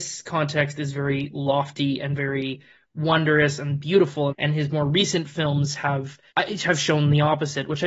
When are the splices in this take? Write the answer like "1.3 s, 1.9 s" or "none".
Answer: 4.3 s, 6.3 s